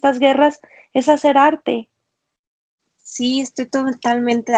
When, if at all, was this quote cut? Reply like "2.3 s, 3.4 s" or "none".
2.8 s